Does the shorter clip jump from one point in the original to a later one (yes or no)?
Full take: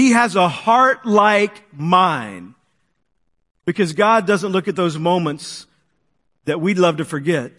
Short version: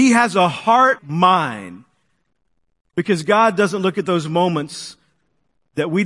yes